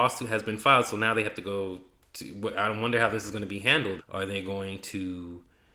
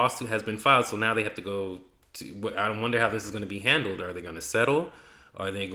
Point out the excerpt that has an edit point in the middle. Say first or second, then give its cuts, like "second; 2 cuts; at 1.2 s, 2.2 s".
first; 1 cut; at 4.0 s